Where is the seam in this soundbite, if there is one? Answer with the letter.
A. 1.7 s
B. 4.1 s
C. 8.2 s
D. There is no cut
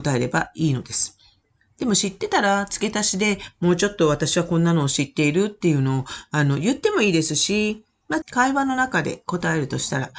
C